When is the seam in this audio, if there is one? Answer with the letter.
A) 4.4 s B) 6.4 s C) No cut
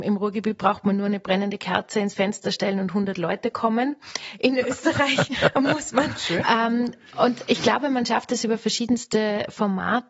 B